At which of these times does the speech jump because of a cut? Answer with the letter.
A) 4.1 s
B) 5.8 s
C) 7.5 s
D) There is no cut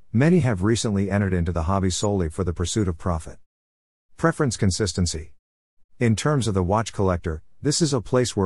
B